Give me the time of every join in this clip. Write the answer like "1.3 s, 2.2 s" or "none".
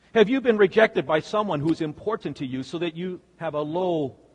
none